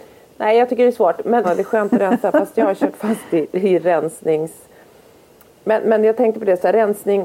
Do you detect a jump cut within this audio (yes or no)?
yes